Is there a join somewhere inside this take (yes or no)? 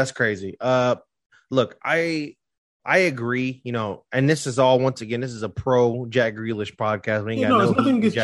no